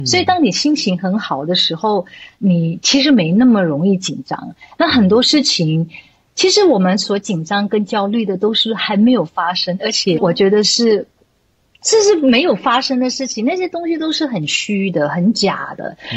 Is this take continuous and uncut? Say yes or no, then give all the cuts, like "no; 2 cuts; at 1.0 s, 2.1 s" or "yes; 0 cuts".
no; 1 cut; at 10.2 s